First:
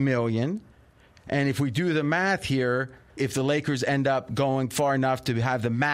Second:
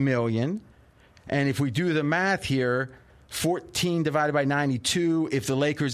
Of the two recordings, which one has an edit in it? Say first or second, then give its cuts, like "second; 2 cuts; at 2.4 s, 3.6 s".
first; 1 cut; at 3.2 s